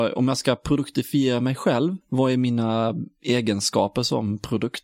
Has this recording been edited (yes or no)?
yes